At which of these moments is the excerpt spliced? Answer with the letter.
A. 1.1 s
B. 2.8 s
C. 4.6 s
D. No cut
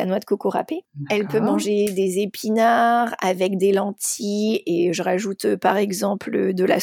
D